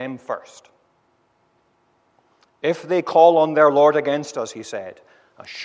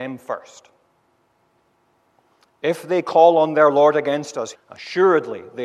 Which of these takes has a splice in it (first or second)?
second